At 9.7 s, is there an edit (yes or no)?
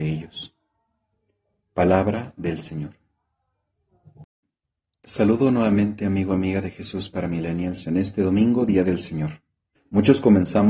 yes